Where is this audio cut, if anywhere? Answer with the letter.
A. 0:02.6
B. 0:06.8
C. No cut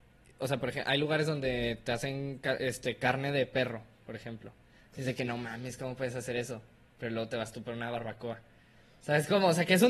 A